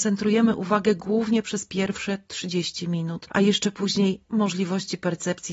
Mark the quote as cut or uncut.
cut